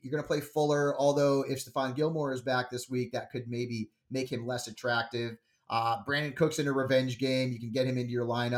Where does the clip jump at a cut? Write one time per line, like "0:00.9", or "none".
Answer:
none